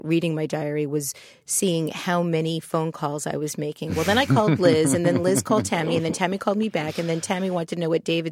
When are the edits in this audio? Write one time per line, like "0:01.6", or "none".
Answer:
none